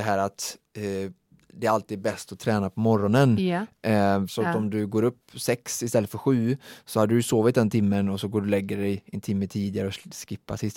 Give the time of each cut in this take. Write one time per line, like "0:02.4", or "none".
0:04.3